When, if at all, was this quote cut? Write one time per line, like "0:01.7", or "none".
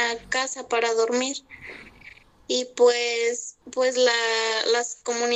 0:03.6